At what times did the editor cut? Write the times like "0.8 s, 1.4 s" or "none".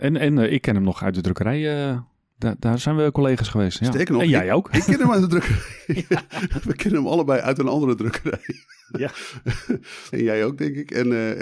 10.1 s